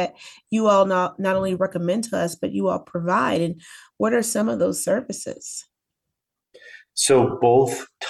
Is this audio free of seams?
yes; 0 cuts

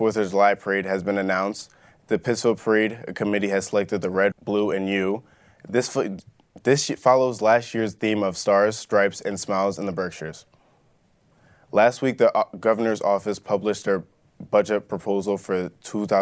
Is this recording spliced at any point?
yes; 1 cut; at 4.3 s

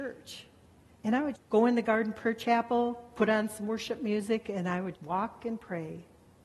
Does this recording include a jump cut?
yes; 2 cuts; at 1.3 s, 4.9 s

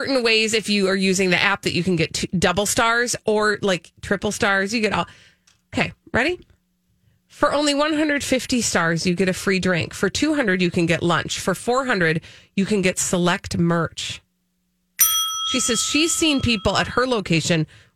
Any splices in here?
no; 0 cuts

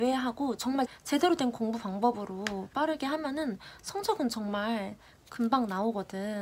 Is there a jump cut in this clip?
no; 0 cuts

